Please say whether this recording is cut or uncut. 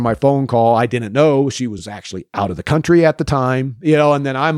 uncut